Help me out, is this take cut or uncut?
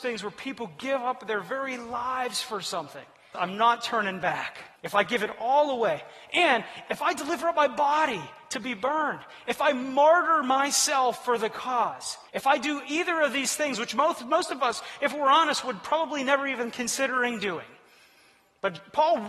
cut